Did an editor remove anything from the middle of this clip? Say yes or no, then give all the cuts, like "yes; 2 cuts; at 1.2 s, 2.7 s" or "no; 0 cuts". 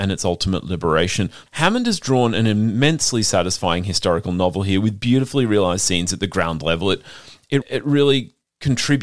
yes; 2 cuts; at 1.5 s, 7.6 s